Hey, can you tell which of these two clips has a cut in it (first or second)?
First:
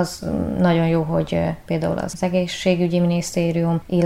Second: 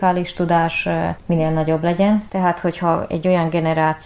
second